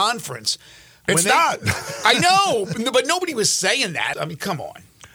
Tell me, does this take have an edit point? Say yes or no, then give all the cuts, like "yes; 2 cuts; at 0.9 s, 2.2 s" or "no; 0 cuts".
yes; 1 cut; at 4.1 s